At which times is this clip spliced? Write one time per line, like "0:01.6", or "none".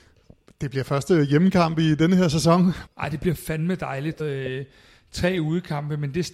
0:02.9
0:04.2